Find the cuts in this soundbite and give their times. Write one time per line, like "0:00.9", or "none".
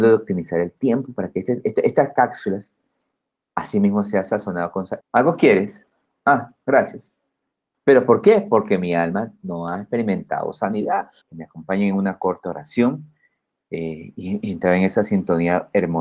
0:05.0
0:07.7
0:11.2